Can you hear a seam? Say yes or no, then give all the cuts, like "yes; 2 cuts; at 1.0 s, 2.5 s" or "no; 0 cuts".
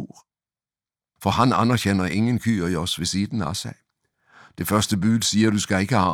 yes; 1 cut; at 1.2 s